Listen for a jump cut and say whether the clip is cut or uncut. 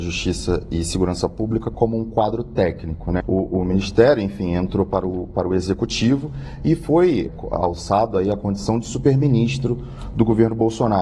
cut